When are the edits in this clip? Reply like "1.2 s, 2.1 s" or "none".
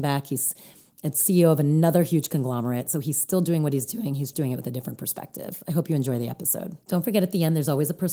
4.3 s